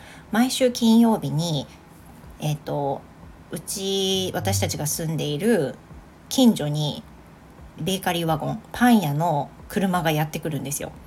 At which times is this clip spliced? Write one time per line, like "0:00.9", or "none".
0:07.8